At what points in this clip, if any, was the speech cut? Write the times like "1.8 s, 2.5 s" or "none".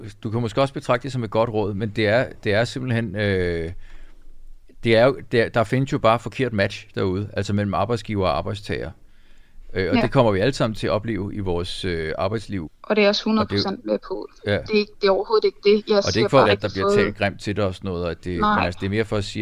12.7 s, 16.4 s